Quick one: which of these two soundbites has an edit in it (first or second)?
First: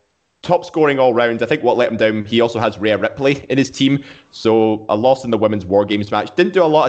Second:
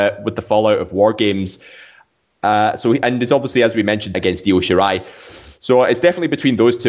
second